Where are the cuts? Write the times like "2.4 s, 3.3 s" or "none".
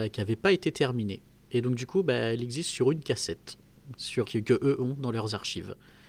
4.2 s